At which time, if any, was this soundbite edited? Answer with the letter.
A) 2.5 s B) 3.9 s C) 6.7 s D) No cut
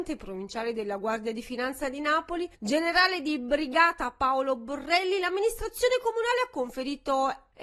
A